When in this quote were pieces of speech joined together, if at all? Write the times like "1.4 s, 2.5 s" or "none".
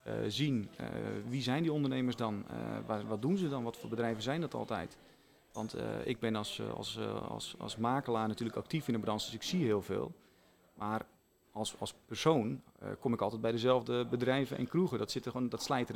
none

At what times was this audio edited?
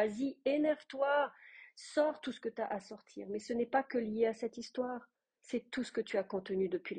none

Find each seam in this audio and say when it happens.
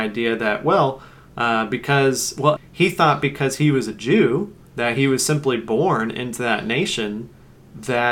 2.6 s, 4.7 s

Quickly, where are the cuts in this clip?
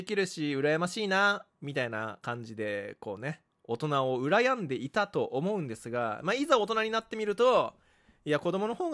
none

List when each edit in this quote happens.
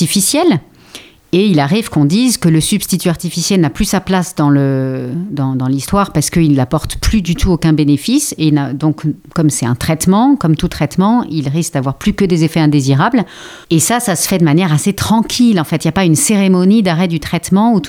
13.6 s

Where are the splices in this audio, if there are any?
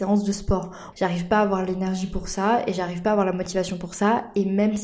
0.9 s

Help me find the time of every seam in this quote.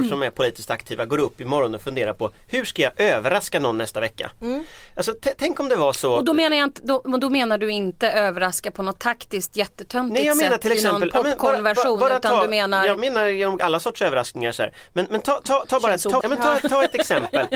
16.2 s

